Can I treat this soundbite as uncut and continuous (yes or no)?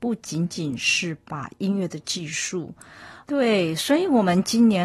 no